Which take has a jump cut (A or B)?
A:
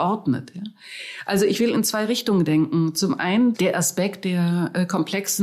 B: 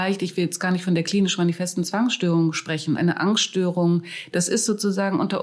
B